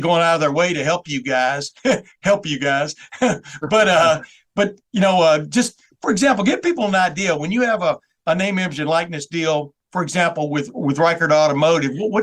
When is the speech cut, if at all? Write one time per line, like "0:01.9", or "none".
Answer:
none